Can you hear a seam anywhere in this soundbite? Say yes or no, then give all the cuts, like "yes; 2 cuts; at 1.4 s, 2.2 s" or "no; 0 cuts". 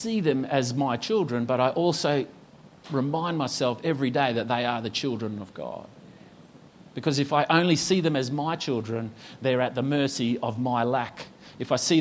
no; 0 cuts